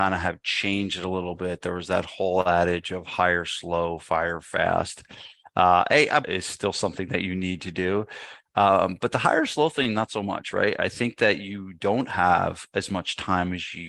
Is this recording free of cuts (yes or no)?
no